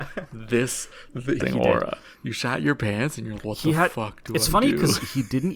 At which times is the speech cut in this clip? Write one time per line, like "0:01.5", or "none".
0:01.4
0:03.4

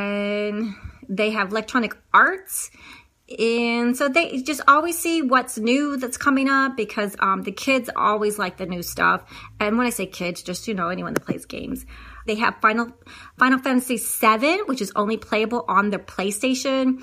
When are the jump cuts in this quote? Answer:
0:12.3

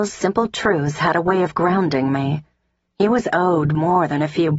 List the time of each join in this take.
0:02.8

